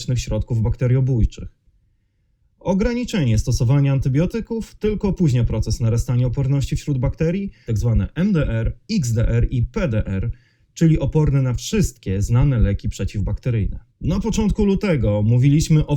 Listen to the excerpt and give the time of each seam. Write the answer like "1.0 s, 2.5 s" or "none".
7.7 s, 13.9 s